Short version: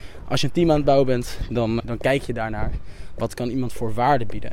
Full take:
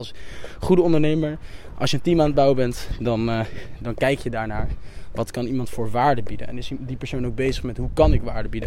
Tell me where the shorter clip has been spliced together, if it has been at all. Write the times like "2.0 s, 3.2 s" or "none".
1.8 s